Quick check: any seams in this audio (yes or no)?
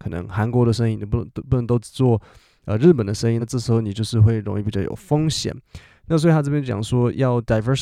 no